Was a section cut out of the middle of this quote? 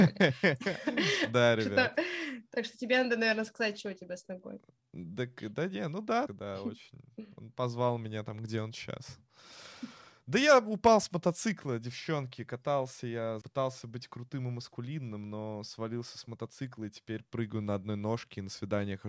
yes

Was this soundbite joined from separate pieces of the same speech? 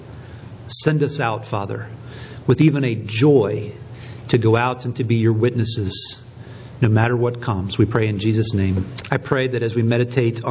yes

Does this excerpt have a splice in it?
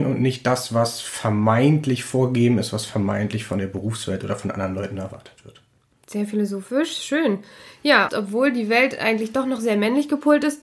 yes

